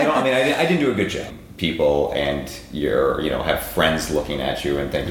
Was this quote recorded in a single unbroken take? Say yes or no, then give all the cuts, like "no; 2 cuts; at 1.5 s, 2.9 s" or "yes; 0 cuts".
no; 1 cut; at 1.3 s